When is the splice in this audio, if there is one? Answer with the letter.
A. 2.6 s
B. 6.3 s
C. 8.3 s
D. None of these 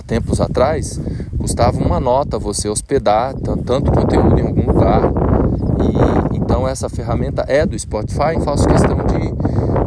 C